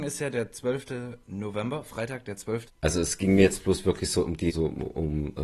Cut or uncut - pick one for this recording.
cut